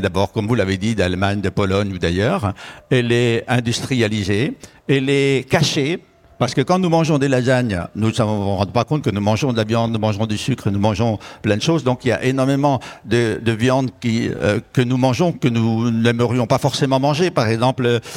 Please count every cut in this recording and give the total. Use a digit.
0